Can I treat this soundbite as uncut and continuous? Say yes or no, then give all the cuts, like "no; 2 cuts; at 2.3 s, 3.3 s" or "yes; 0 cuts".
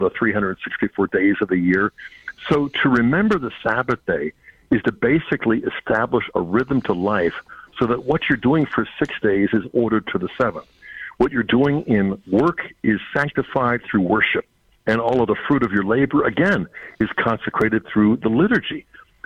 yes; 0 cuts